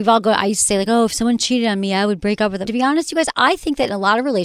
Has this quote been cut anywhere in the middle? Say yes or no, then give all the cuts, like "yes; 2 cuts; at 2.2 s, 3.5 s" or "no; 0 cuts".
yes; 1 cut; at 2.7 s